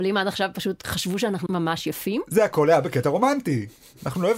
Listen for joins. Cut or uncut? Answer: cut